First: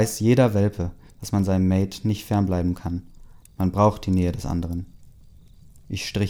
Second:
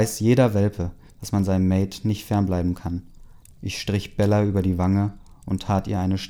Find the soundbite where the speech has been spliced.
second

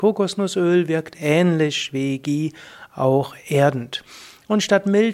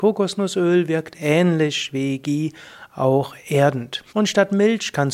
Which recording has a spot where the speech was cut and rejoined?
second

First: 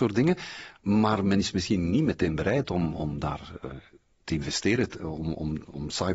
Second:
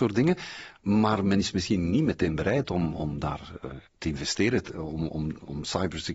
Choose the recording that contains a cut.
second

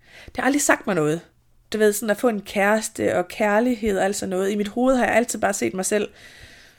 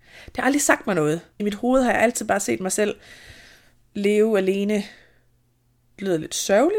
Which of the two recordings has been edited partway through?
second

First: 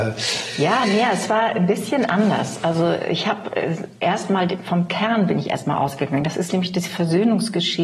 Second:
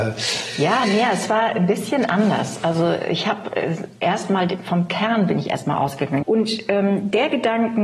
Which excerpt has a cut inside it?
second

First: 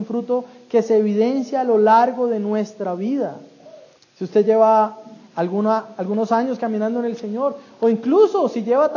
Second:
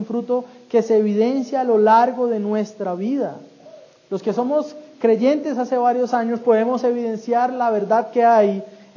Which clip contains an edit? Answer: first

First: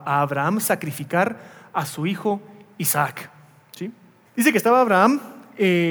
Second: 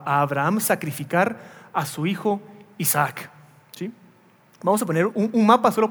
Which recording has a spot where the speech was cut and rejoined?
first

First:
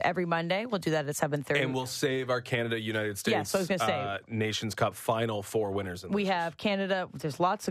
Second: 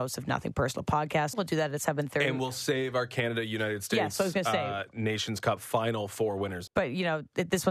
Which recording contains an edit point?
second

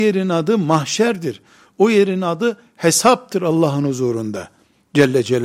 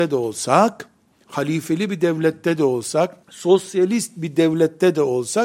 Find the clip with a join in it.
second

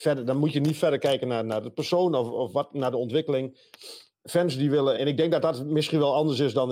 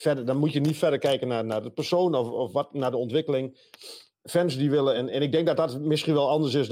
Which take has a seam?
first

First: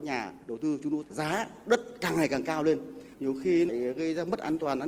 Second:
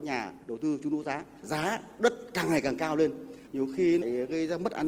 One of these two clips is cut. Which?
first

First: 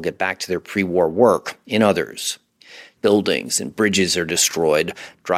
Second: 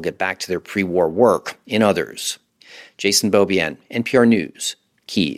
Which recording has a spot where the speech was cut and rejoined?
first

